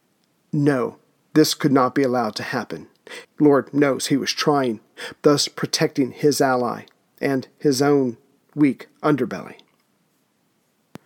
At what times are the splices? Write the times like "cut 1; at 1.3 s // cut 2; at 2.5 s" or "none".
cut 1; at 3.2 s // cut 2; at 5.2 s